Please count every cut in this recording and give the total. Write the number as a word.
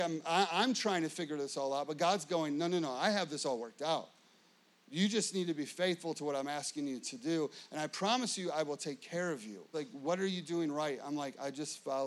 one